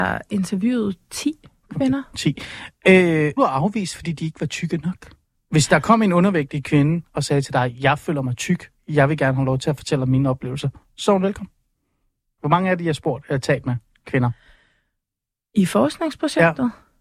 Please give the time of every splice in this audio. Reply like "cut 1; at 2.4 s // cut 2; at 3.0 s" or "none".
cut 1; at 3.4 s // cut 2; at 5.3 s // cut 3; at 12.4 s